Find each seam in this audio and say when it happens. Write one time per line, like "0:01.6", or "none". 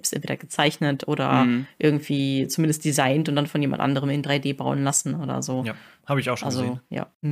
none